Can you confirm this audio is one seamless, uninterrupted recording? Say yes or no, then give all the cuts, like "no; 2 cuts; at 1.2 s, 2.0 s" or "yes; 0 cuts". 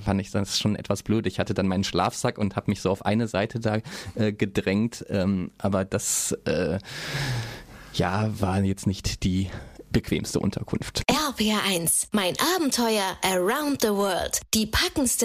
yes; 0 cuts